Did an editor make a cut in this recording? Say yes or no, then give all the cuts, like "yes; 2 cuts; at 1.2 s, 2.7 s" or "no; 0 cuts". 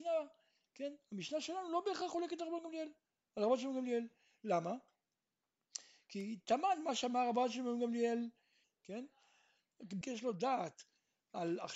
yes; 2 cuts; at 8.6 s, 10.0 s